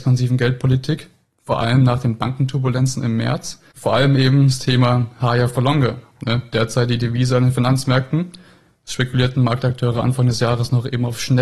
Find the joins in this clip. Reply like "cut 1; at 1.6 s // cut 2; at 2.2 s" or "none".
cut 1; at 3.7 s